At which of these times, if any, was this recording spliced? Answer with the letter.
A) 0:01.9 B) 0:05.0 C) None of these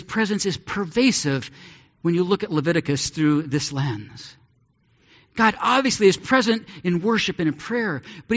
C